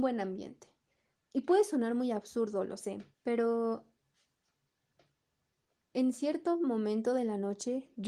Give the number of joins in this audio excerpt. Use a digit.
2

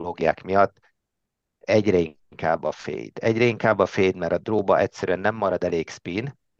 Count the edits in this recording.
0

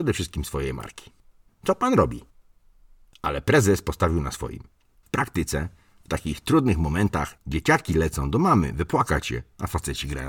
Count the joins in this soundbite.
3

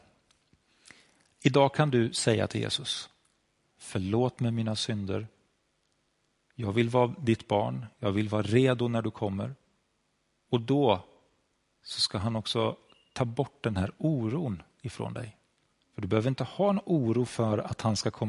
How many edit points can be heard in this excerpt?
1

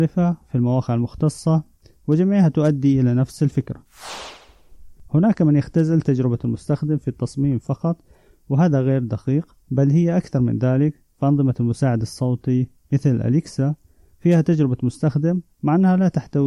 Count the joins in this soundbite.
1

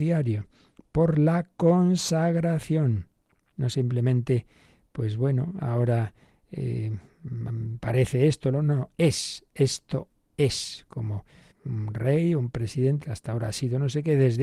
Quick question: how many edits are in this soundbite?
3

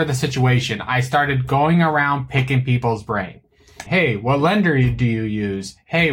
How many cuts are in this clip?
1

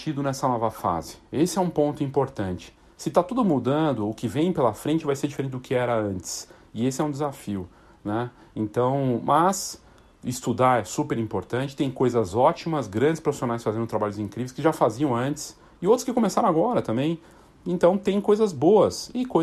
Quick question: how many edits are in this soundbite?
0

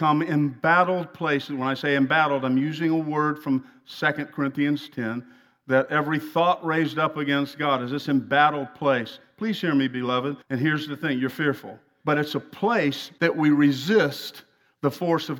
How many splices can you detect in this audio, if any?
3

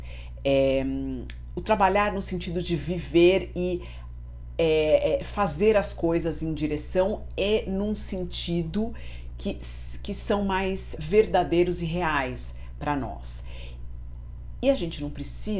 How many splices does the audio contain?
1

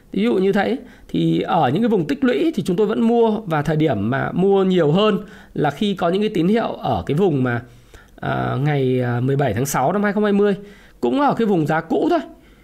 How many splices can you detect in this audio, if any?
0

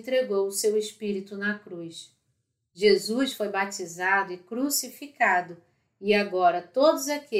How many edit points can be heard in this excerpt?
1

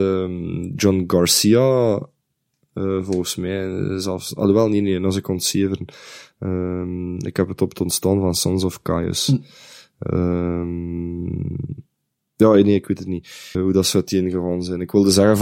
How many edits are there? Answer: 1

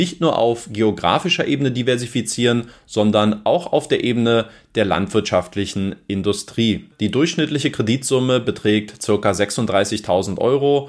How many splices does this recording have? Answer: 0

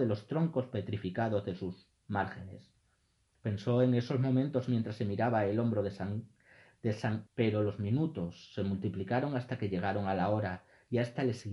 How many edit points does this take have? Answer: 2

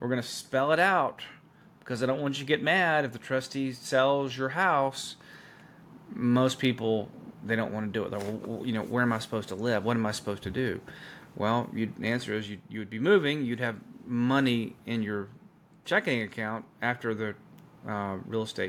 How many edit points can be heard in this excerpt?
0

